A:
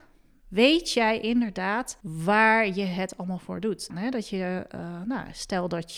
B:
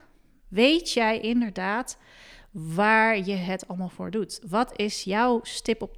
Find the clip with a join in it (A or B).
A